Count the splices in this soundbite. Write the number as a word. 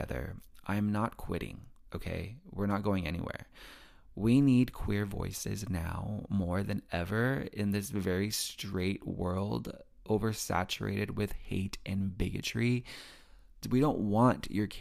one